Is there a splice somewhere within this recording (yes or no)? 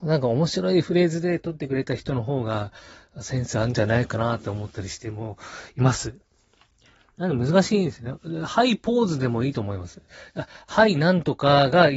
no